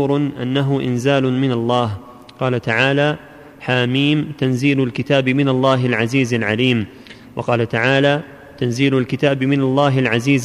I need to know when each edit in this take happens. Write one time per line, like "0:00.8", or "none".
none